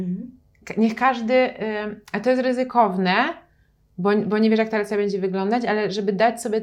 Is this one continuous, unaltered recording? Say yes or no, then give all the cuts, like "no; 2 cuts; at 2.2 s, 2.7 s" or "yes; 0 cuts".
yes; 0 cuts